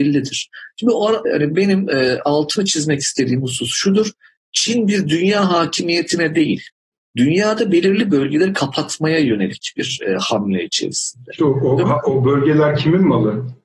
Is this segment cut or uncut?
cut